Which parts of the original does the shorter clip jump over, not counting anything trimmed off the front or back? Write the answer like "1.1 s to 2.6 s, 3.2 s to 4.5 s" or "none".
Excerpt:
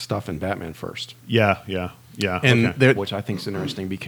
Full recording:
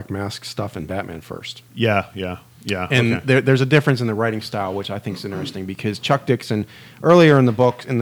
3.4 s to 4.7 s